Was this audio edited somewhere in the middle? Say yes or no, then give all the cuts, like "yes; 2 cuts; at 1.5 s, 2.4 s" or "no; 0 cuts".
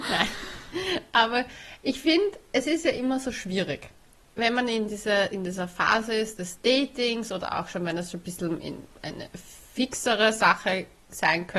no; 0 cuts